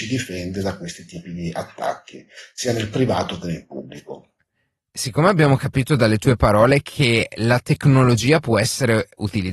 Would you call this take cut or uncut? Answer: uncut